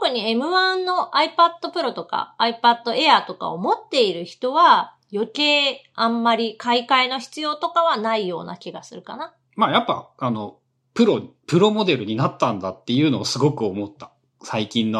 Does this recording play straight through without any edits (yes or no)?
no